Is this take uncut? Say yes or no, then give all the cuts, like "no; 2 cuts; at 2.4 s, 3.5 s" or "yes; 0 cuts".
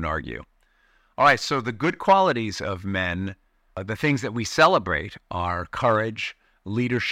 yes; 0 cuts